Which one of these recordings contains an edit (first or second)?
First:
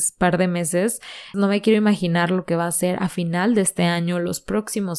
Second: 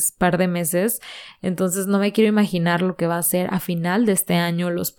first